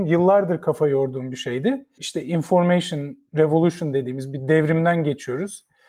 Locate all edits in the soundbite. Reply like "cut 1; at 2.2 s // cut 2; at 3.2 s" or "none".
cut 1; at 2.0 s